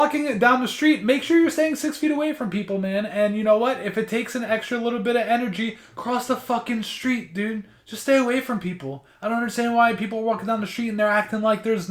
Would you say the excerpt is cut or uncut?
uncut